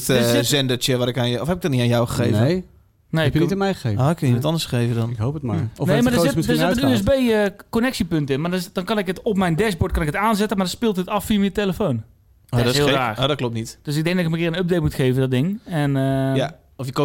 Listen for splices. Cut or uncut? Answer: uncut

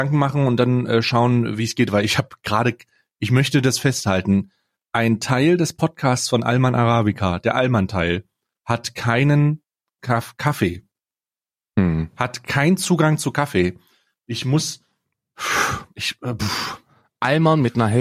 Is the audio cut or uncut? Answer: uncut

